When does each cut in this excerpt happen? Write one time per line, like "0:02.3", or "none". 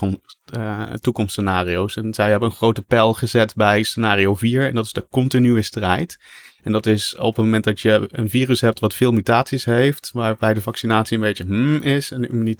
0:08.1